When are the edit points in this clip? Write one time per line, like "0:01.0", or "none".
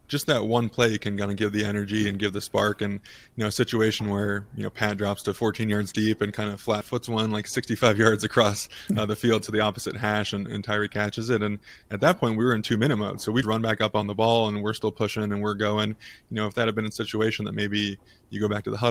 0:13.4